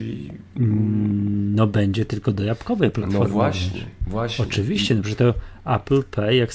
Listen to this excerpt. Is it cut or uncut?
uncut